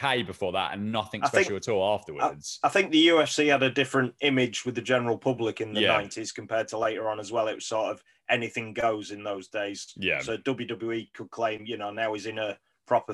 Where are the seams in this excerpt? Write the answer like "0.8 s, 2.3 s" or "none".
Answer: none